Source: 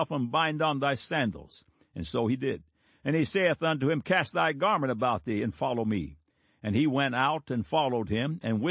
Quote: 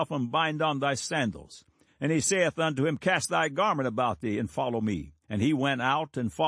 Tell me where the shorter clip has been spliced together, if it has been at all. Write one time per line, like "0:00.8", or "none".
0:01.9
0:05.2